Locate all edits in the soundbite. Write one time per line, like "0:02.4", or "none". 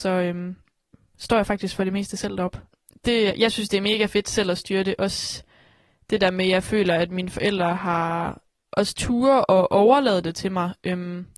0:03.3